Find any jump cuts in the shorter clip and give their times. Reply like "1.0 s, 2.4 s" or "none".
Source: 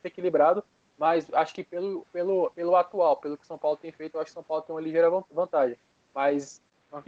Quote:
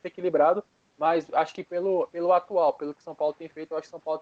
1.7 s